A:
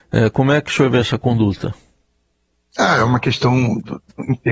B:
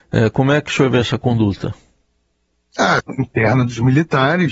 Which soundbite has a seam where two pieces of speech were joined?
B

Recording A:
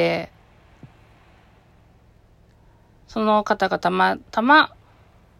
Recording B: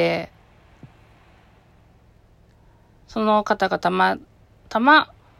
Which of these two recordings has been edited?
A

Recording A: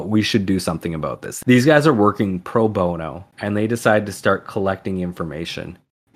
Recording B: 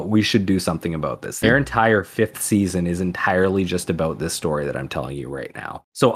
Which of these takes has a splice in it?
B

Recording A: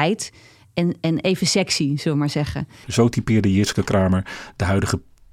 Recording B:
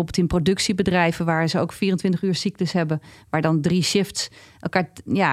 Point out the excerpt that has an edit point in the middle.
A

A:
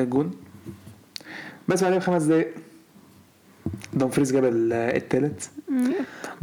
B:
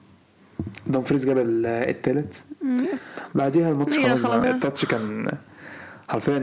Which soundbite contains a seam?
B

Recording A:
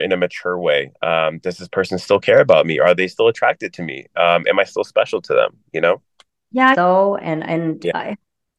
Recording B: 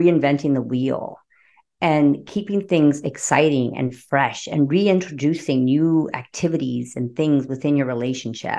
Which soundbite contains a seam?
A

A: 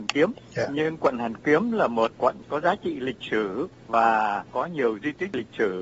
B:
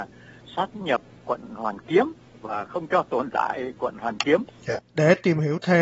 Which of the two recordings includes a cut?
B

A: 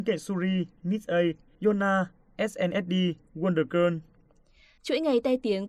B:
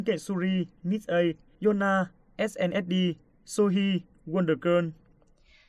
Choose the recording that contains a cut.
A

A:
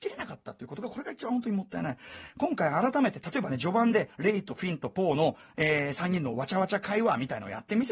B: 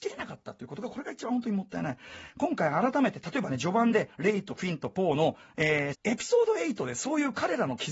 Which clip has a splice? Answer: B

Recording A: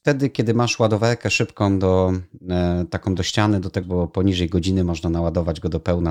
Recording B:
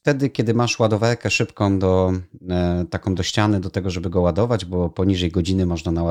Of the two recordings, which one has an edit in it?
A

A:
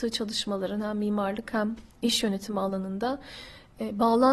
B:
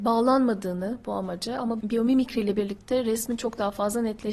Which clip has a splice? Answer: B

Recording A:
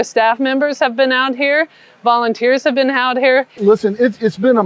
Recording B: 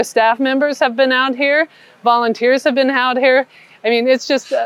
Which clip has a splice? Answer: A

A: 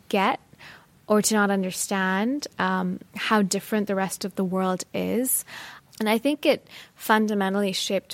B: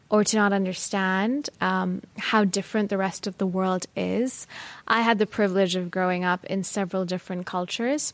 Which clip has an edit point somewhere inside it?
A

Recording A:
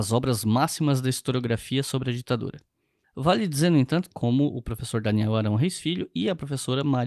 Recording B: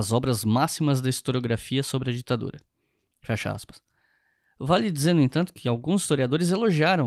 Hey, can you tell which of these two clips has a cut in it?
A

